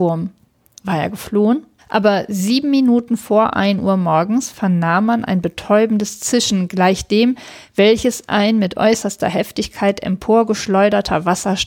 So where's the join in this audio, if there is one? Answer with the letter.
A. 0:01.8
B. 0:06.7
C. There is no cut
A